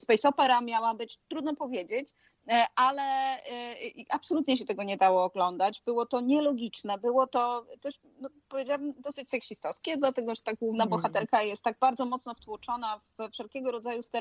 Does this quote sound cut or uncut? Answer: uncut